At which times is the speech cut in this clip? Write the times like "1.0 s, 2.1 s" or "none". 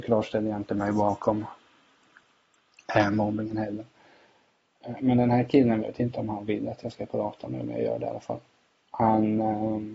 5.8 s